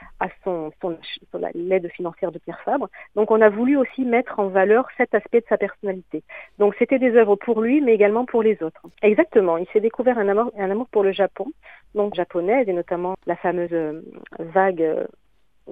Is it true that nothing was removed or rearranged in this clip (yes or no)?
no